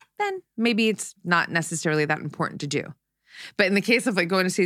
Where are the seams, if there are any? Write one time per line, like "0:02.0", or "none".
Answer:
none